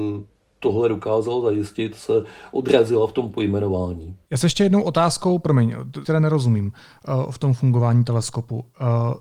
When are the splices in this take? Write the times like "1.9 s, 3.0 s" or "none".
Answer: 4.2 s, 6.0 s